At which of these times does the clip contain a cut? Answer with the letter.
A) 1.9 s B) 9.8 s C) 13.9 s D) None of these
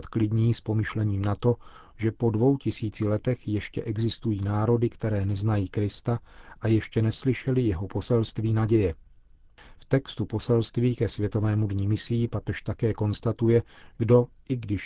C